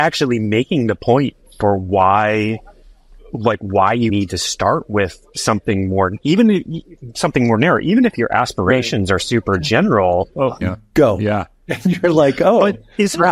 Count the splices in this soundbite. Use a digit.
2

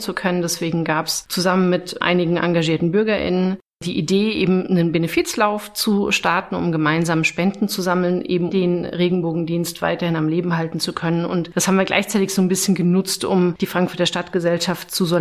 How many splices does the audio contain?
1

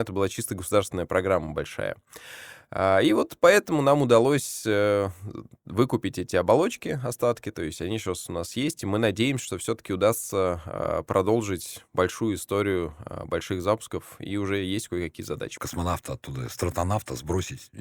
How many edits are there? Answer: 1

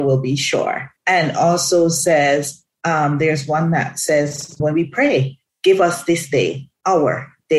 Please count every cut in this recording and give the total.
2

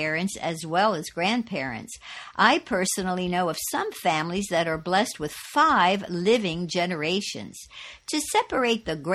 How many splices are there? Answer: 0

